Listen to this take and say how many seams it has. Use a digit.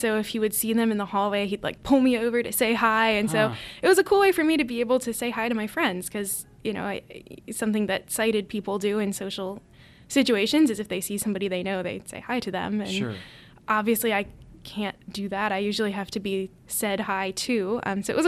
0